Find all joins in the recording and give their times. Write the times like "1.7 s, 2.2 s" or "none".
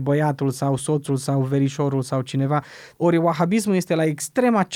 2.9 s